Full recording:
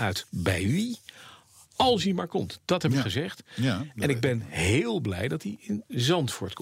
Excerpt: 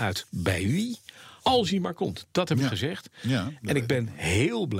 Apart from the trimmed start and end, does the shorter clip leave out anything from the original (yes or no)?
yes